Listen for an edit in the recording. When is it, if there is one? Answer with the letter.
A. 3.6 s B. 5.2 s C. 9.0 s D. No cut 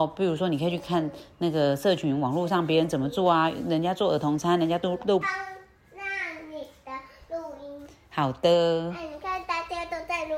B